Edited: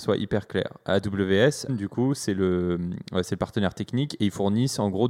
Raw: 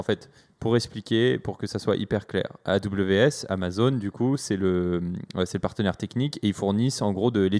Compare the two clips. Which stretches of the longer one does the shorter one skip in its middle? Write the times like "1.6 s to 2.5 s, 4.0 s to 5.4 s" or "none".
3.5 s to 3.9 s